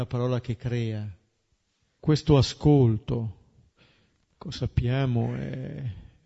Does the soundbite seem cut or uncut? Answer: cut